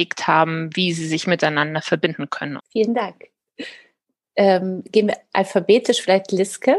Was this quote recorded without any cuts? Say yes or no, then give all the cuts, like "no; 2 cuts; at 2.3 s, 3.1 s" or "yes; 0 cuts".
no; 1 cut; at 2.6 s